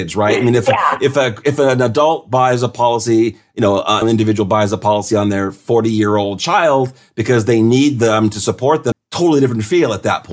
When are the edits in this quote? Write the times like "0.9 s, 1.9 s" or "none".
4.0 s, 8.9 s